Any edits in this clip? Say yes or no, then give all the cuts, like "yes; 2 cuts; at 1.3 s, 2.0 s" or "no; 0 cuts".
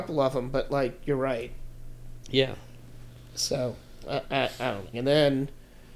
yes; 2 cuts; at 2.2 s, 4.9 s